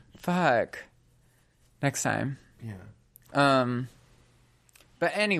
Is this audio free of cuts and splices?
yes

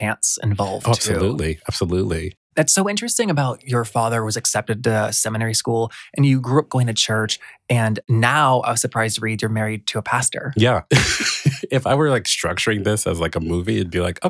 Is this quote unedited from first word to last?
yes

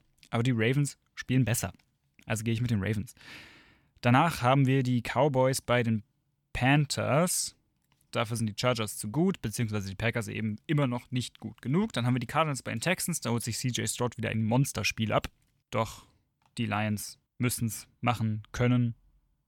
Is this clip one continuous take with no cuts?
no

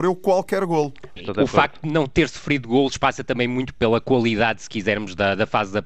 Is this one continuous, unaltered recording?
no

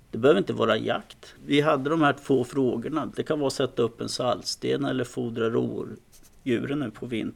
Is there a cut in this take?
yes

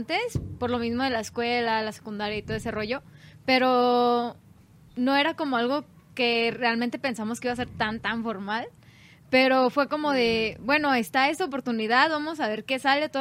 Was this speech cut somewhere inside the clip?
no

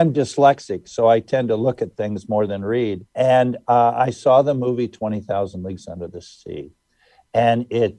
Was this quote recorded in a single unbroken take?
no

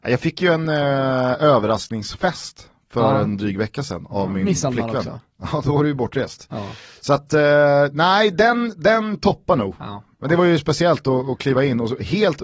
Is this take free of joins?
yes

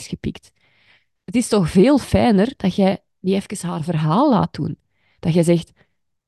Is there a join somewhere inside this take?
no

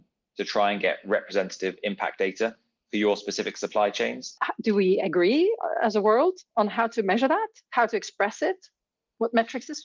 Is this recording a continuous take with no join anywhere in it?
no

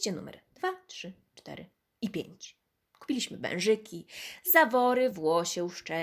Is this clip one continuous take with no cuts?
yes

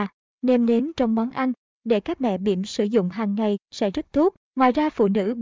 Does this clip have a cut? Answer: yes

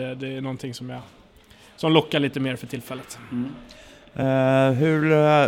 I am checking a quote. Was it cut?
no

